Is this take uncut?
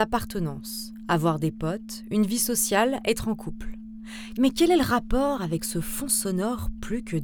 no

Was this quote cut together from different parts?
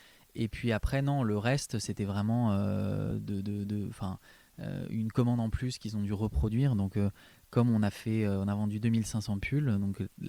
no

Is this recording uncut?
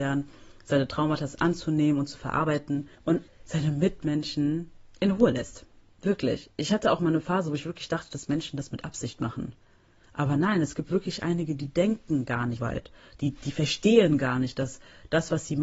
no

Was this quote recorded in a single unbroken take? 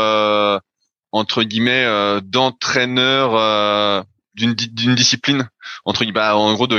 yes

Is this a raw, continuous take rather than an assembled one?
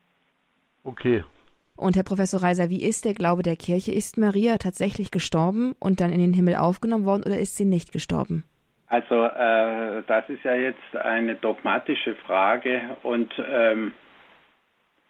no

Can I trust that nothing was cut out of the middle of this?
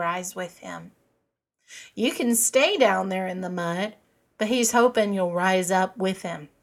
yes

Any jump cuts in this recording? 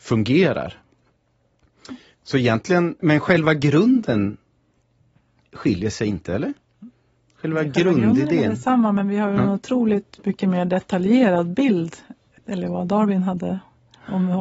yes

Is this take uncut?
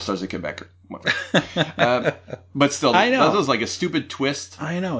no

